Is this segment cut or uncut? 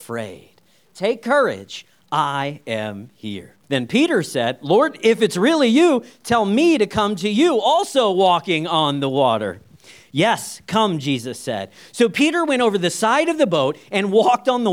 cut